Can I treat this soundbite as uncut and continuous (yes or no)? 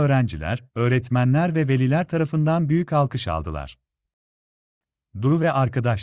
yes